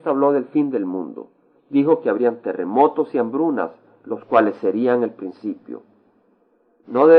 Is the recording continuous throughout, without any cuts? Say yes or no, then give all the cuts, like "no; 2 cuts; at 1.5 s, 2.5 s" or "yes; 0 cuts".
yes; 0 cuts